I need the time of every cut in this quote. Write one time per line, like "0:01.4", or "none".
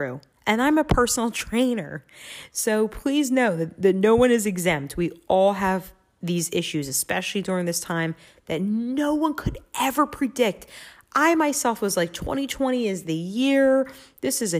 none